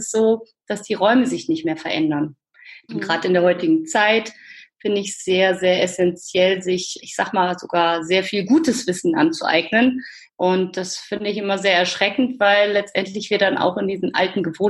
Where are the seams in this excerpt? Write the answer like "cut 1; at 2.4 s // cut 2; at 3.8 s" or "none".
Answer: cut 1; at 2.9 s // cut 2; at 7.0 s // cut 3; at 10.3 s